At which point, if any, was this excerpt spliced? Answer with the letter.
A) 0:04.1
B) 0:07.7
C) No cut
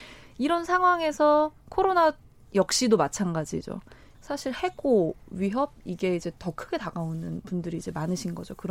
A